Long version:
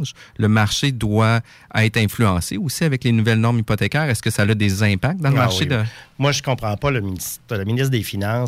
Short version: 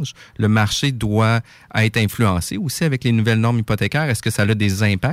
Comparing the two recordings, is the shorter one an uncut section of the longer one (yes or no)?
yes